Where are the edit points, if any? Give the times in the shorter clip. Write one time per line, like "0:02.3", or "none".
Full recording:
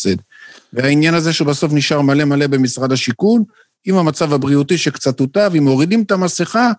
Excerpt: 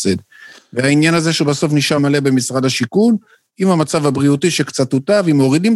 0:02.0